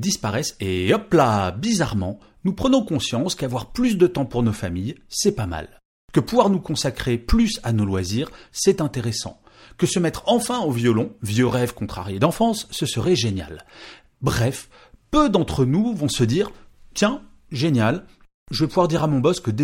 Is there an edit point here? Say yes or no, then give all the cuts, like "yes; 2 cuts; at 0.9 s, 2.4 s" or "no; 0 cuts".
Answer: no; 0 cuts